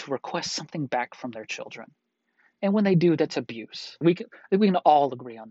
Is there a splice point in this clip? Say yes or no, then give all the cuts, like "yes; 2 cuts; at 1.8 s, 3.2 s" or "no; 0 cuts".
yes; 1 cut; at 4.0 s